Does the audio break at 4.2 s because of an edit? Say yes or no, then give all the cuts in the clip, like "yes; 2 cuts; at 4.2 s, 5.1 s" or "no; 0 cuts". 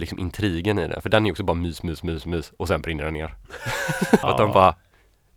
yes; 1 cut; at 4.2 s